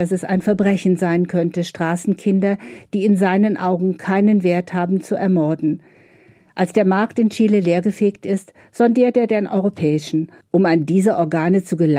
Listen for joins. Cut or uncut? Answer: cut